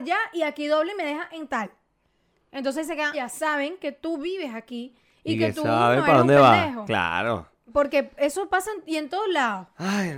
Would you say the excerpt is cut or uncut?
cut